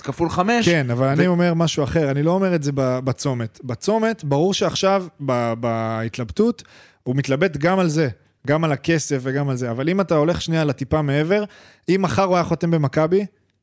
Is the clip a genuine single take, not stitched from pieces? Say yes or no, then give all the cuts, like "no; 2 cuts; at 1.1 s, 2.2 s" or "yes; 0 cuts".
yes; 0 cuts